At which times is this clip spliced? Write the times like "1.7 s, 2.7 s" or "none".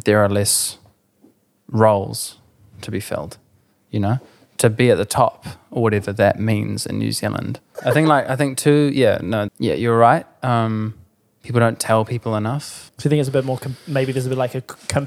7.7 s, 9.5 s, 12.9 s